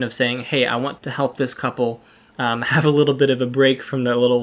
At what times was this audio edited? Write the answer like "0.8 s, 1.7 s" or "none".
1.0 s